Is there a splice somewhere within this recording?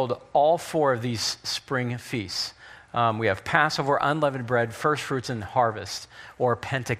no; 0 cuts

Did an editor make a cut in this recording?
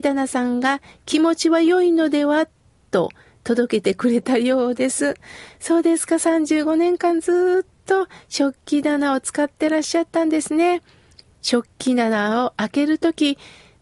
no; 0 cuts

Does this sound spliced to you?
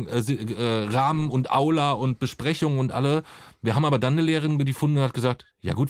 no; 0 cuts

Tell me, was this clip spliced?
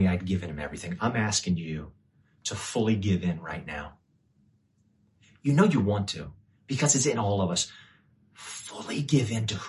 no; 0 cuts

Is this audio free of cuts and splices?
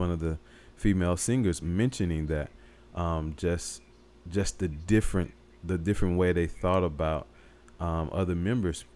yes; 0 cuts

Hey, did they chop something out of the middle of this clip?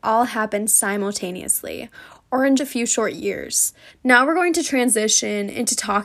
yes; 2 cuts; at 2.6 s, 3.9 s

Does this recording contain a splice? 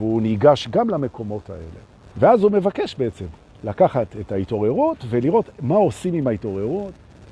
yes; 1 cut; at 2.1 s

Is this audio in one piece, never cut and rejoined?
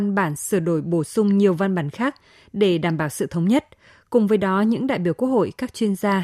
yes; 0 cuts

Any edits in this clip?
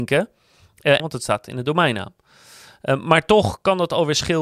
yes; 1 cut; at 1.0 s

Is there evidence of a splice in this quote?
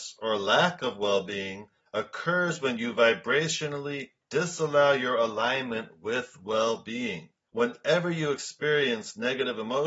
no; 0 cuts

